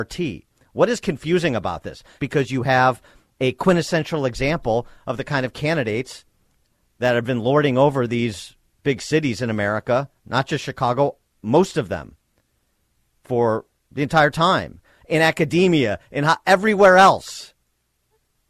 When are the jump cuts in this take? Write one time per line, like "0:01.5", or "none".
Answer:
0:02.2